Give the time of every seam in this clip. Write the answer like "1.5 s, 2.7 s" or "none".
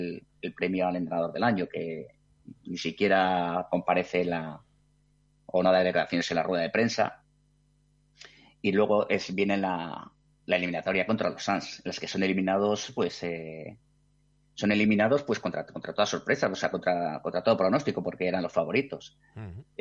none